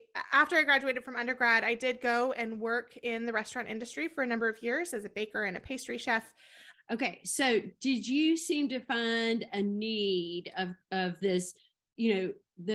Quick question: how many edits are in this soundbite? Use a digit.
1